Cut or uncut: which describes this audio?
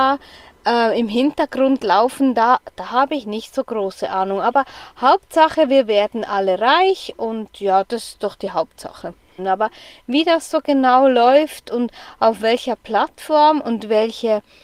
cut